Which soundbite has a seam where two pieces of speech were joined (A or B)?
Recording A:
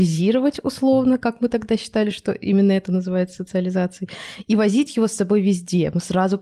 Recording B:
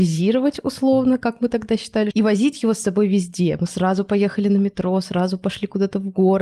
B